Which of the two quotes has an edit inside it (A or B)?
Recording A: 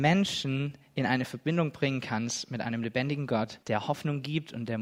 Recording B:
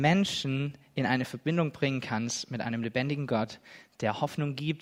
A